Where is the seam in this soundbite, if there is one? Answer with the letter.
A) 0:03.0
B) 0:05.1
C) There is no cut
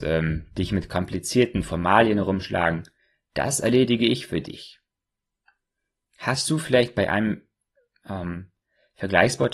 C